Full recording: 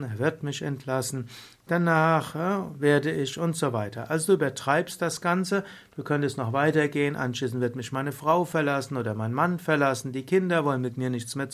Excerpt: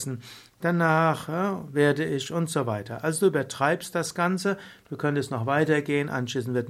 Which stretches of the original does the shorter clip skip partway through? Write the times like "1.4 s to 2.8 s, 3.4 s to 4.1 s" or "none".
none